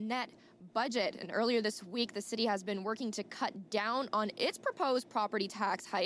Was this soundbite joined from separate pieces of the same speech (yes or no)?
no